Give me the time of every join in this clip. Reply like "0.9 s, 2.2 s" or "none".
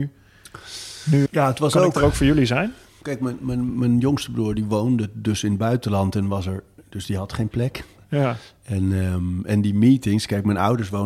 1.3 s